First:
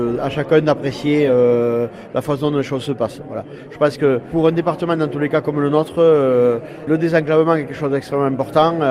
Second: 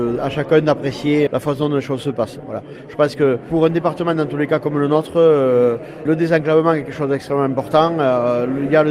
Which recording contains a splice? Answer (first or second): second